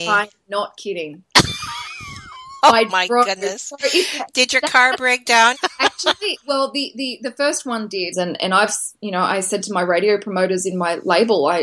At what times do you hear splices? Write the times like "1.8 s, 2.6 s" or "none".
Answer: 5.5 s, 8.1 s